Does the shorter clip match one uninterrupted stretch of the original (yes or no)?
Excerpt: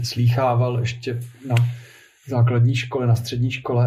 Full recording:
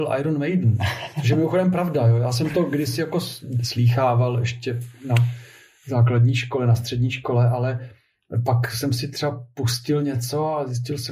yes